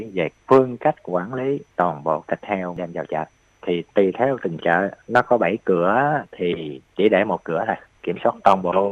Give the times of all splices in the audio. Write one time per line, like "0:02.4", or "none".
0:05.0